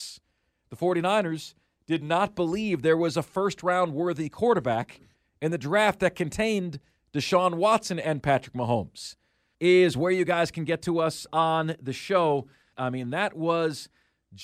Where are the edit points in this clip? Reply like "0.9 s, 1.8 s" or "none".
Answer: 9.5 s, 11.3 s, 12.7 s